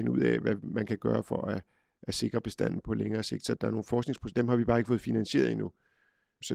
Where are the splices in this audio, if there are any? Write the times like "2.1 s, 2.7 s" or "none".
none